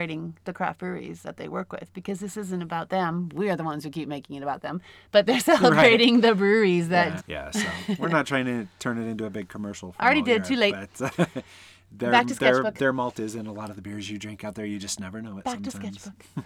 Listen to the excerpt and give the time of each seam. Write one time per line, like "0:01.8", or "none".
0:07.2